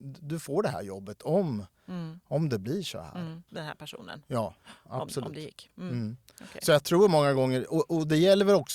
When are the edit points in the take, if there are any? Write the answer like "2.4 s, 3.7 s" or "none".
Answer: 3.5 s